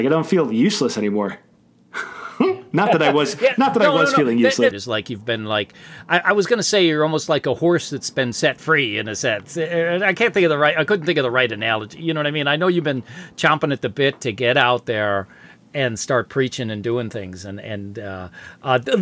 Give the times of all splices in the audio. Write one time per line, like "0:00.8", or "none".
0:04.7